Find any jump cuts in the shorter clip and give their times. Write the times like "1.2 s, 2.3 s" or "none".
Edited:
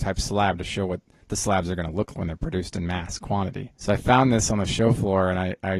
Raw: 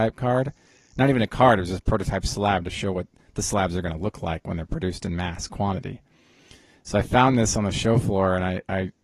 2.1 s, 3.7 s

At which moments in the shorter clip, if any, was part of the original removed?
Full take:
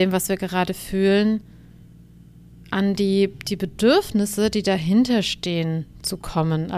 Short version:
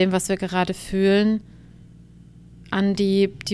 none

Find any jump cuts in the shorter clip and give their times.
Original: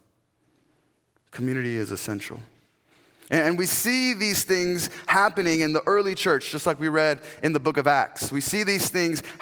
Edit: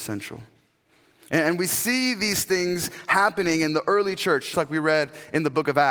4.5 s

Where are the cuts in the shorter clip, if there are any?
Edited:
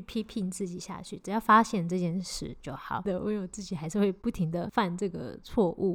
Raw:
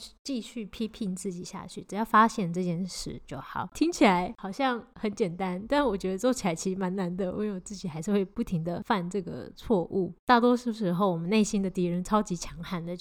3.1 s

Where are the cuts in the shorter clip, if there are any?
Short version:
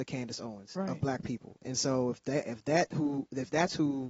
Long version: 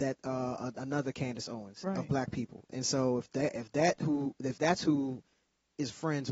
none

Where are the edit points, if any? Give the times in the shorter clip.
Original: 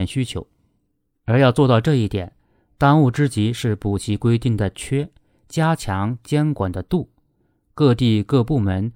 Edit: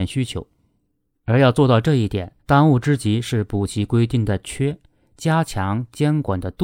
2.4 s

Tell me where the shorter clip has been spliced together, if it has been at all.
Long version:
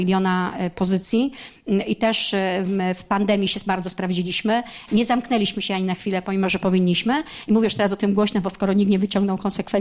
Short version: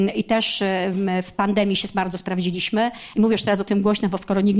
3.1 s

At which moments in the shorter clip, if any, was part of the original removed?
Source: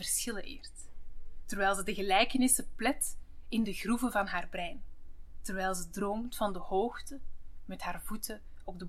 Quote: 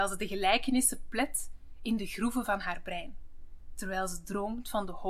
none

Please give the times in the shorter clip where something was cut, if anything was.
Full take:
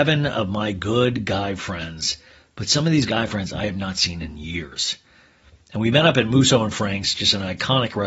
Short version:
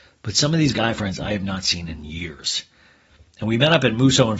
none

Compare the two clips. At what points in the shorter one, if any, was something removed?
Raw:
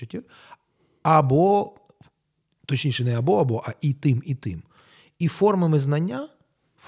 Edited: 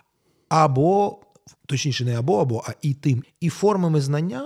1.6 s, 3.2 s

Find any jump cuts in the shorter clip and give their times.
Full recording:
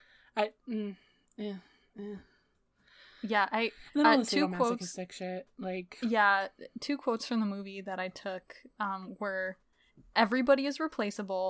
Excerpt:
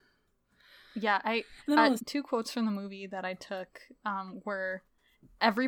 2.0 s

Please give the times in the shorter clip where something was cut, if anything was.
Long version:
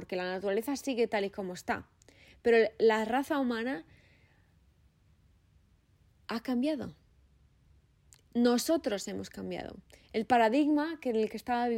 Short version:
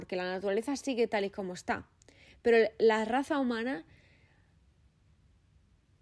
none

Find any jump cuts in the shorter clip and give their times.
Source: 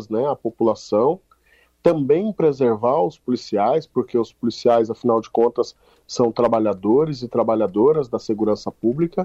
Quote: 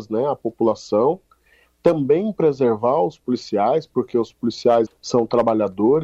4.9 s

